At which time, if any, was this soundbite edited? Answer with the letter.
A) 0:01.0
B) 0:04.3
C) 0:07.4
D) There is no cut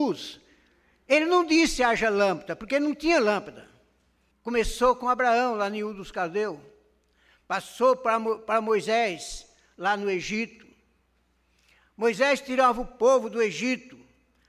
B